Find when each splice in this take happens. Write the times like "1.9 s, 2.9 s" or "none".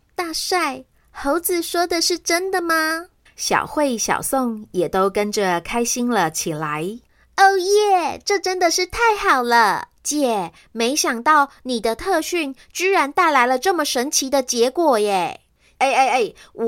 3.3 s, 10.0 s